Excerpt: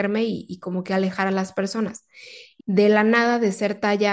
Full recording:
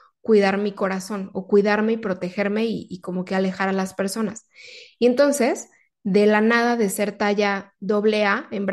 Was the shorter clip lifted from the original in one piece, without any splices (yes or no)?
no